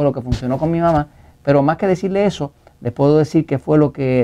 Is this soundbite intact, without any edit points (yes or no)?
yes